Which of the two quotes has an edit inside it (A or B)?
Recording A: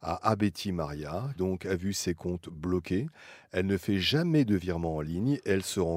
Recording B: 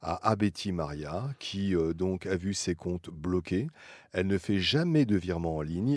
A